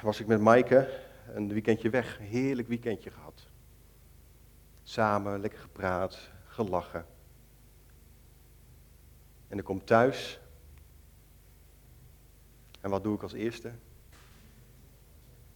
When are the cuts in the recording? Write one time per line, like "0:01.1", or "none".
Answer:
none